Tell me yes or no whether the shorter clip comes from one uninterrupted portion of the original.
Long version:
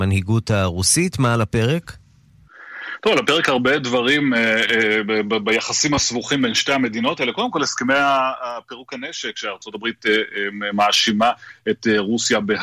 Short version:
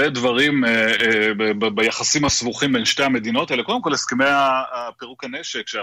yes